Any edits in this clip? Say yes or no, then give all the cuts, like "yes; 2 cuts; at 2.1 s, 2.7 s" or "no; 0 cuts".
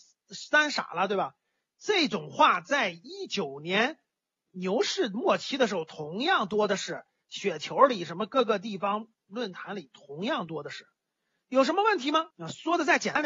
yes; 1 cut; at 12.3 s